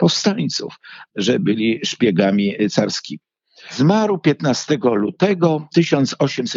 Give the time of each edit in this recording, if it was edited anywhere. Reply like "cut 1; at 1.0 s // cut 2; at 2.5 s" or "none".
cut 1; at 1.1 s